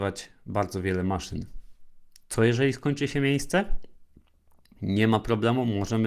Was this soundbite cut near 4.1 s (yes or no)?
no